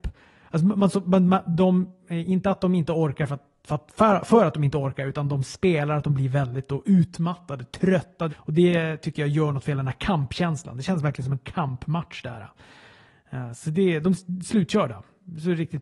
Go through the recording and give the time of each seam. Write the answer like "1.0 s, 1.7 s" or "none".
8.3 s